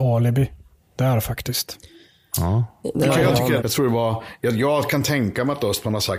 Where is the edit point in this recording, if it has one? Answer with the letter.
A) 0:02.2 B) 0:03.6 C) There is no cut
B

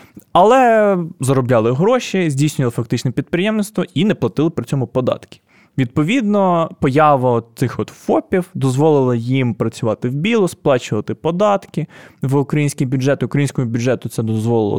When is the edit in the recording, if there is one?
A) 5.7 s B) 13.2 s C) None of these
C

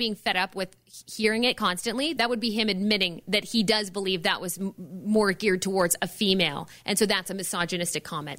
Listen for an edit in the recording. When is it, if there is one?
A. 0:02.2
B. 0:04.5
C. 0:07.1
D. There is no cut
A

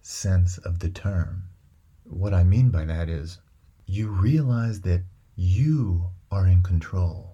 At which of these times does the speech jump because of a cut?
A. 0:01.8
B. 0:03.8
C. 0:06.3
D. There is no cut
D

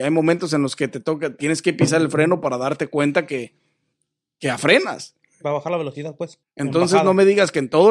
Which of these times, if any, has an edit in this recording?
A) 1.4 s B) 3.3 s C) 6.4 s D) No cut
C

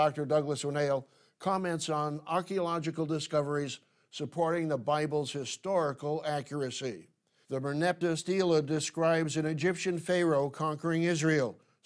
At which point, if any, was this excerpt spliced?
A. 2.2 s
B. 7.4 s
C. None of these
B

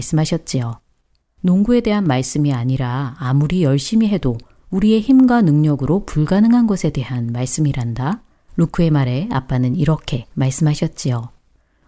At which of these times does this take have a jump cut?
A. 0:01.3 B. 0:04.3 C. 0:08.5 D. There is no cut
C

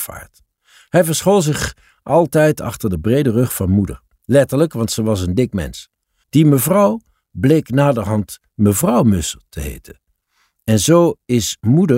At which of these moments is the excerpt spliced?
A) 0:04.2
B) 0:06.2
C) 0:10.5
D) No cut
B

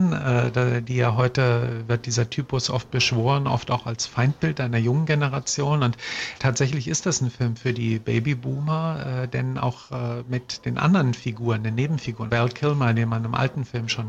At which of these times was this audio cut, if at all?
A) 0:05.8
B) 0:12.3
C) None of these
B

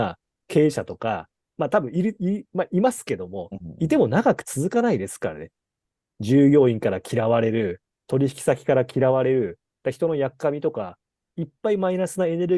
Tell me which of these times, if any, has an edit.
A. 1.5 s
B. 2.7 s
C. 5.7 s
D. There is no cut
D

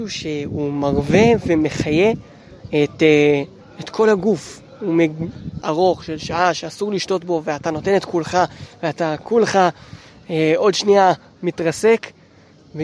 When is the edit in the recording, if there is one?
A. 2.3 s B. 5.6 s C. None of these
B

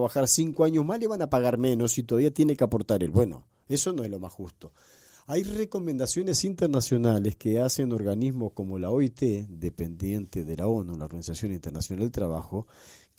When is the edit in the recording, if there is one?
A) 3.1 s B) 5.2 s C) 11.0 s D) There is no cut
D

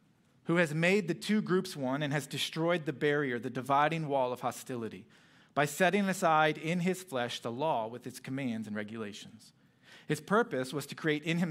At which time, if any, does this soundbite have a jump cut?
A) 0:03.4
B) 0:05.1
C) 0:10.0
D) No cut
D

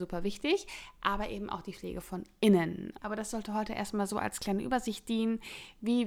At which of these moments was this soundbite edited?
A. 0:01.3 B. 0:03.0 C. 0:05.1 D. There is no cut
B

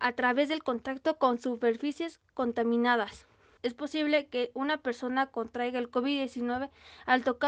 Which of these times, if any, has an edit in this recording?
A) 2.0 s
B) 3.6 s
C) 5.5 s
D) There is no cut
B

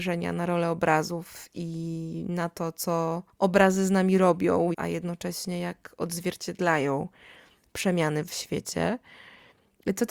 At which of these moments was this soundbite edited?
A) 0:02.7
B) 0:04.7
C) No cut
B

